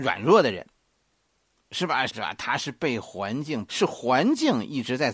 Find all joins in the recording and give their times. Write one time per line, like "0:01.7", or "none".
0:02.1
0:03.7